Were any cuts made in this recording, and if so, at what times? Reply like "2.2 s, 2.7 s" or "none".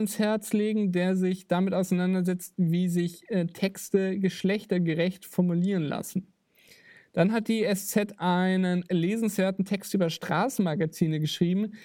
none